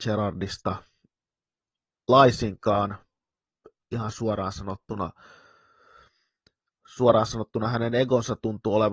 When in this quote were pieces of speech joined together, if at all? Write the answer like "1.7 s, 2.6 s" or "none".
none

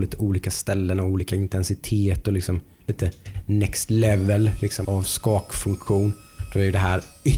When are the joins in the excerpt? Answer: 4.8 s

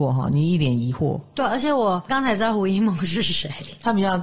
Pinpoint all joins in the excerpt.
2.1 s

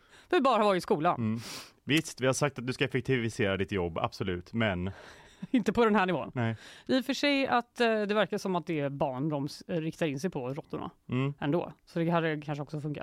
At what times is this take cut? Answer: none

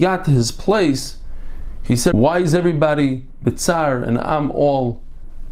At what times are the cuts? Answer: 2.1 s

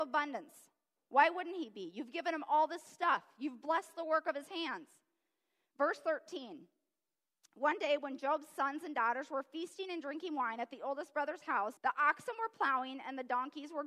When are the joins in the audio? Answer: 11.8 s

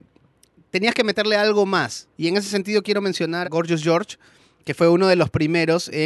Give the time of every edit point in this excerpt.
2.1 s, 3.4 s

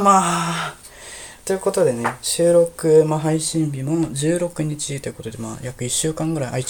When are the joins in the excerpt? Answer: none

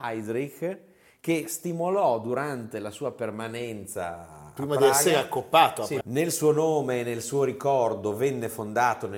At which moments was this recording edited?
6.0 s

